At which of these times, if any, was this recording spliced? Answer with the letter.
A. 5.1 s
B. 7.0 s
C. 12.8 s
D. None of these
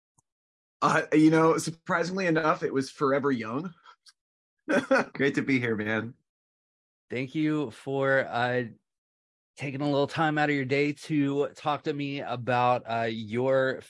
A